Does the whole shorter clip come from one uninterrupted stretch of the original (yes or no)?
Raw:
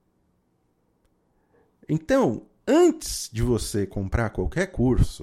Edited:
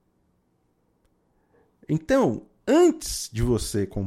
yes